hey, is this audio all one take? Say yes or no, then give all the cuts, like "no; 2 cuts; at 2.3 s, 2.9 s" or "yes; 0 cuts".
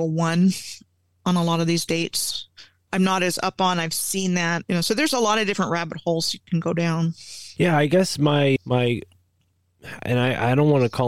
no; 3 cuts; at 2.9 s, 4.6 s, 7.5 s